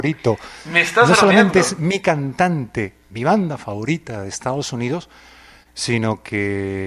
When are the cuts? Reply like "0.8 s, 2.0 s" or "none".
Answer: 3.1 s